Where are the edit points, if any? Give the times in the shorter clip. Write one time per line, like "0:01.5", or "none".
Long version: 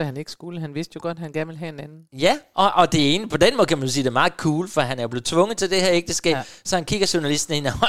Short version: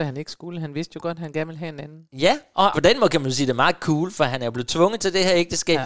0:02.7